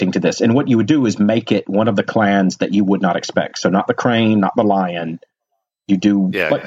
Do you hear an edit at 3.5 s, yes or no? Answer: no